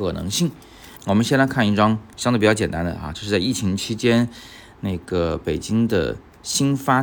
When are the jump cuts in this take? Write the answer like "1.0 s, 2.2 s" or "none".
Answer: 1.0 s